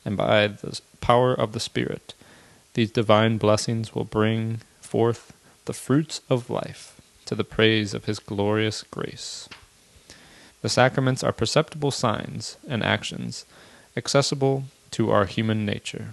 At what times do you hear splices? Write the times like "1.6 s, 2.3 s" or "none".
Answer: 10.5 s, 12.6 s